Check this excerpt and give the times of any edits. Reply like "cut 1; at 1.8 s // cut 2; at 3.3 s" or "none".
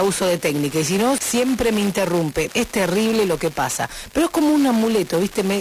cut 1; at 1.2 s // cut 2; at 2.5 s